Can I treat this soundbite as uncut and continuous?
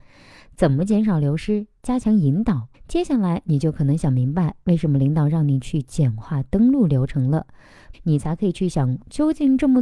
no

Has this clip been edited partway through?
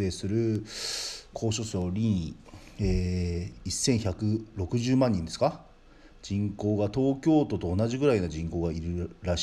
yes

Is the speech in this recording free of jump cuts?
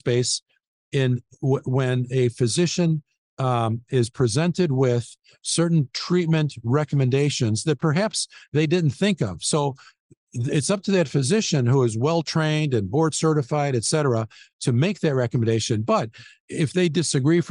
yes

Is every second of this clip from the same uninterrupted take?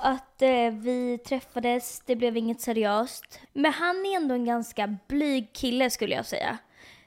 no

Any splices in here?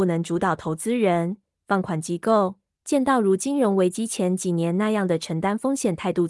yes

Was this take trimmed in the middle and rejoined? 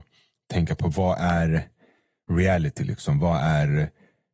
no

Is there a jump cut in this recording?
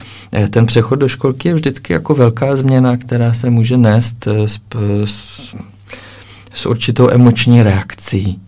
no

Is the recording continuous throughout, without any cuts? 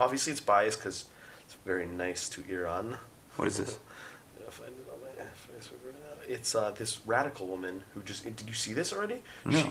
no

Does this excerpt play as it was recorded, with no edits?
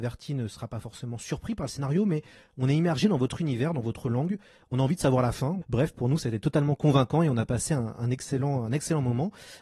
no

